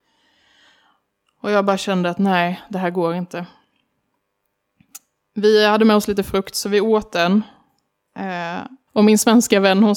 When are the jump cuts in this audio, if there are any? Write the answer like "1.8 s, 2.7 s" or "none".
8.9 s